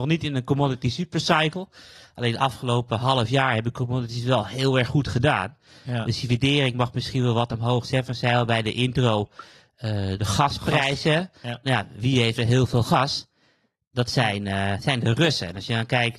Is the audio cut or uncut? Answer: uncut